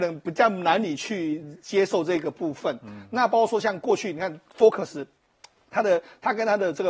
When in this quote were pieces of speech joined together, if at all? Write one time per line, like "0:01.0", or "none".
none